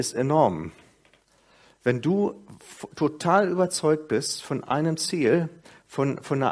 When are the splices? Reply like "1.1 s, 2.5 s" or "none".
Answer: none

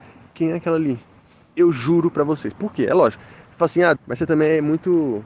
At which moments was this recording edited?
4.0 s

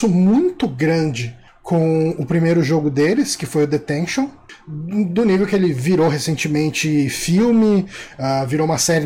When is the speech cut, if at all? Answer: none

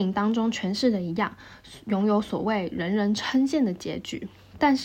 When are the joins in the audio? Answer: none

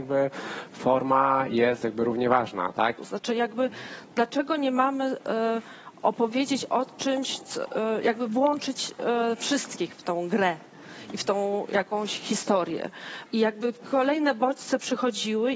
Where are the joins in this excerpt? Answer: 3.0 s, 13.3 s

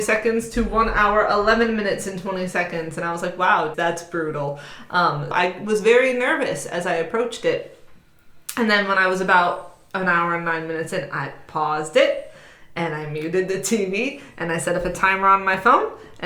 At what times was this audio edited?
3.7 s, 5.3 s

